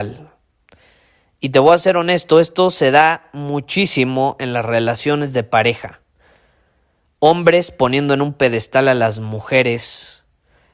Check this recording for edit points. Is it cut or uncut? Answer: uncut